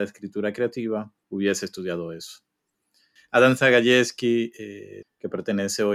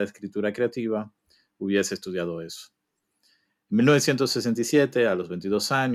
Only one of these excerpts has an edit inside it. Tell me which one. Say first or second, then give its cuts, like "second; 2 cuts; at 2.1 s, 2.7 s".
first; 3 cuts; at 1.2 s, 3.2 s, 5.0 s